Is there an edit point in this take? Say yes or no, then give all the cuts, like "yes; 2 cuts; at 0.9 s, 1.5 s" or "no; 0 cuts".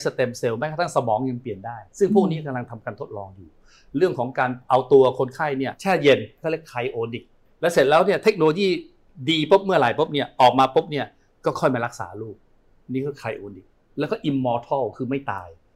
yes; 1 cut; at 1.9 s